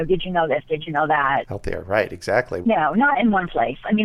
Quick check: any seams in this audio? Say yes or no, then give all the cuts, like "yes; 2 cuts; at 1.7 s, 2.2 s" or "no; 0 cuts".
yes; 2 cuts; at 1.5 s, 2.6 s